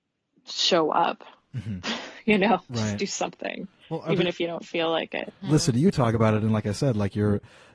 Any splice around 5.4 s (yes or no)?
yes